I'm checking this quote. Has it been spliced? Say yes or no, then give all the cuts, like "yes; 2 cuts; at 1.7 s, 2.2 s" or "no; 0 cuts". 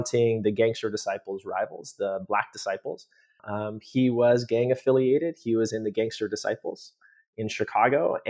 yes; 1 cut; at 3.4 s